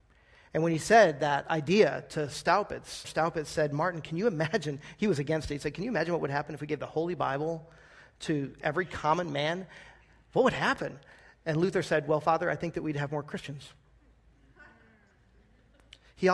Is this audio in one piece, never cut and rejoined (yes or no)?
no